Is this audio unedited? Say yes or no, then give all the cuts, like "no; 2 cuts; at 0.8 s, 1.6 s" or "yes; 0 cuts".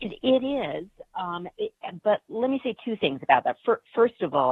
yes; 0 cuts